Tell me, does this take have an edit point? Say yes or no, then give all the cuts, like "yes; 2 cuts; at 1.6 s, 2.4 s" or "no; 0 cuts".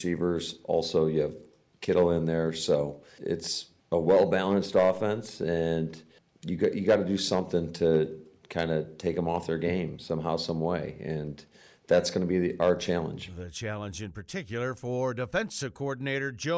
no; 0 cuts